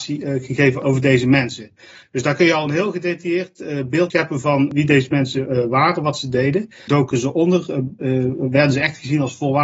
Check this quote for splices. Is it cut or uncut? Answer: cut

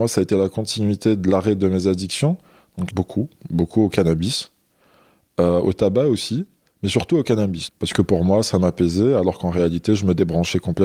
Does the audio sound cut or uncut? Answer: cut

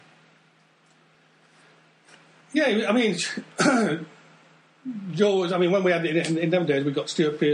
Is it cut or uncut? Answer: uncut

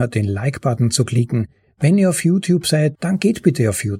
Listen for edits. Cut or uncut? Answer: cut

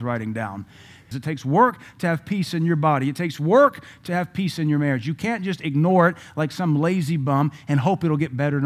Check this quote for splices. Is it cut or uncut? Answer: cut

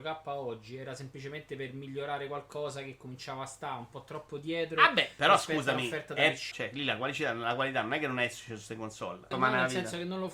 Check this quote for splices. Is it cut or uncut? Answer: cut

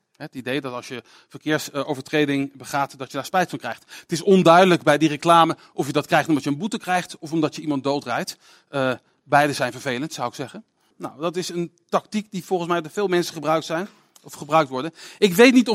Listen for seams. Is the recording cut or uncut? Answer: uncut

